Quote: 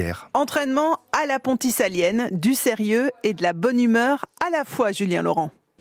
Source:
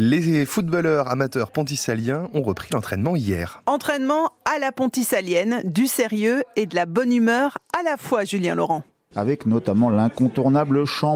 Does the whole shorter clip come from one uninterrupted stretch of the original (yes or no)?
yes